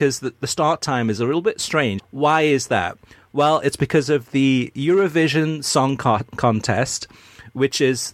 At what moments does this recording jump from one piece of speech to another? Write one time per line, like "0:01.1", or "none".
0:02.0